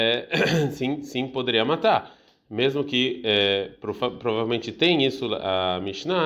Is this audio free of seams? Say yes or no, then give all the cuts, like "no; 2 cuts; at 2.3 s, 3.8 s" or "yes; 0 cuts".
yes; 0 cuts